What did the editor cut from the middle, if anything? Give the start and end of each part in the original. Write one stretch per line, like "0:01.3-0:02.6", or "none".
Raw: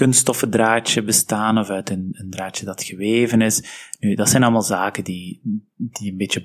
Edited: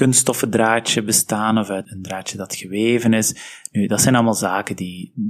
0:01.8-0:02.1